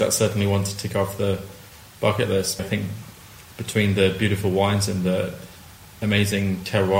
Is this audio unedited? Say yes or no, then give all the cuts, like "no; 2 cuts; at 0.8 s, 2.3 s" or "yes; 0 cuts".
no; 1 cut; at 2.6 s